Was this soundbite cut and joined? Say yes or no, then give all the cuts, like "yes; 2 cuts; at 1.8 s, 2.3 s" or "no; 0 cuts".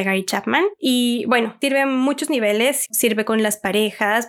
no; 0 cuts